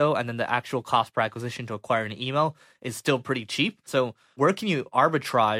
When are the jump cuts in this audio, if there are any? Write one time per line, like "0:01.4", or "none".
0:03.9

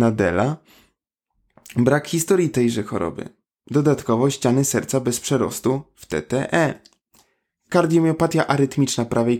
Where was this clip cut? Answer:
none

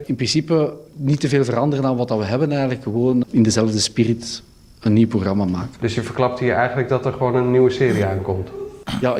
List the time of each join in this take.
0:03.2

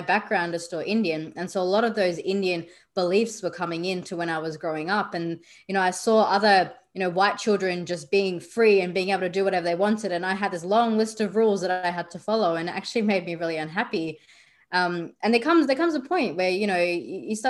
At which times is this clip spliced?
none

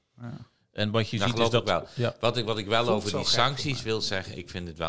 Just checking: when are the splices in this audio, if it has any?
none

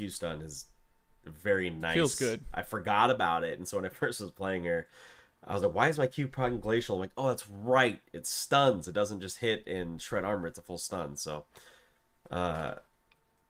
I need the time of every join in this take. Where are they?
none

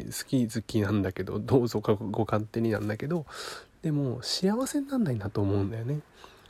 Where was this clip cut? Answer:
none

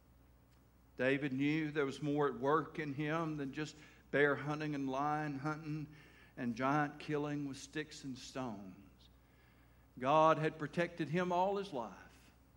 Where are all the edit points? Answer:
none

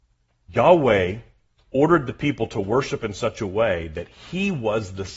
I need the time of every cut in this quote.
none

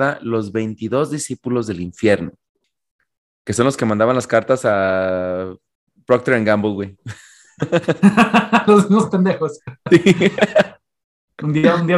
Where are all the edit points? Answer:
none

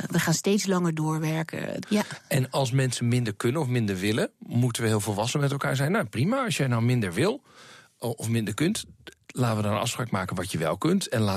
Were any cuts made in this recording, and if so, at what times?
0:01.8

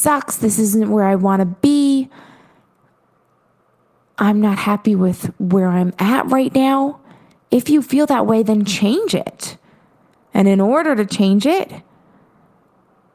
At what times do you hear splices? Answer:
none

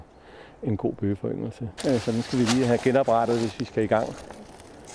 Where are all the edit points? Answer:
0:01.8

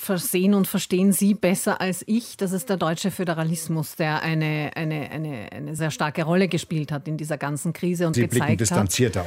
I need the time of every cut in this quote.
0:05.8
0:08.1

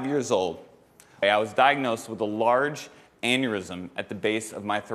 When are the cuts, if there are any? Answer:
0:01.2

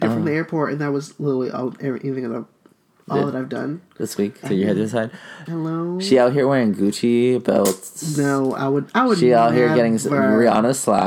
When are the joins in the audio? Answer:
0:04.4
0:05.5

